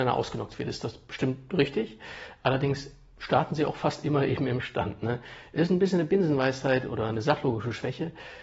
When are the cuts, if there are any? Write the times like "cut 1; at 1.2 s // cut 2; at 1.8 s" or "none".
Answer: none